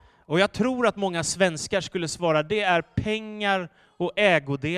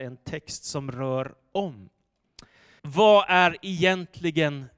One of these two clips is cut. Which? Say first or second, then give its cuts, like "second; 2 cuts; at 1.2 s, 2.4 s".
second; 1 cut; at 2.8 s